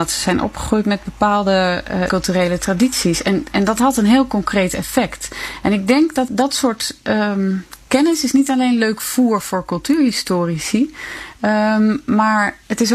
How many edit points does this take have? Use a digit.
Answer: 2